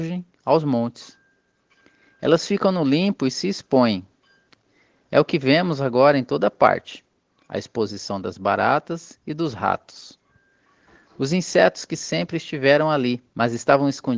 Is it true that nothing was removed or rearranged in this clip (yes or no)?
no